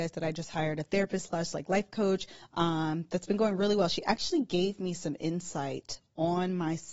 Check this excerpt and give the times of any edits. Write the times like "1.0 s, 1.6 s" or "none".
none